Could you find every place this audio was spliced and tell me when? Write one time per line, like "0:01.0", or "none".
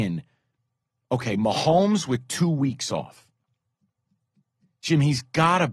none